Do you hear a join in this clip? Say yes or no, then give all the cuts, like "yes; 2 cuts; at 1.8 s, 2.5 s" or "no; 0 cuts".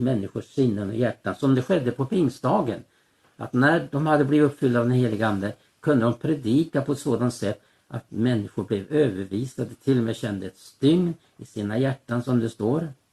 no; 0 cuts